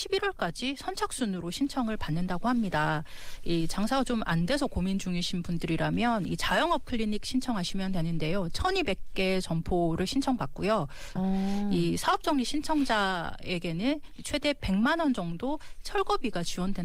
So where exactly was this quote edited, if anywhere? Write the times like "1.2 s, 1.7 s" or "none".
11.2 s